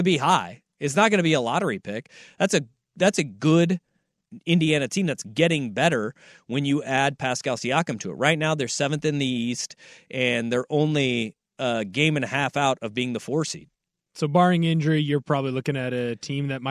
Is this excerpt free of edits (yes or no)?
yes